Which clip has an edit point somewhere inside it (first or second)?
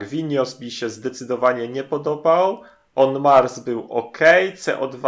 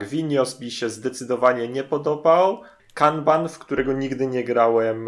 second